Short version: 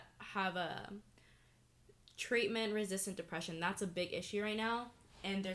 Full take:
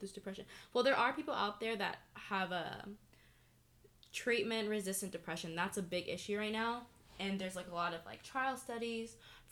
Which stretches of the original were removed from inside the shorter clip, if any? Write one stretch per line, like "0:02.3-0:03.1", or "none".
none